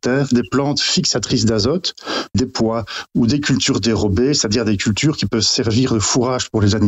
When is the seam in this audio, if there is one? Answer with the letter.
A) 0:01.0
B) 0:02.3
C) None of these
B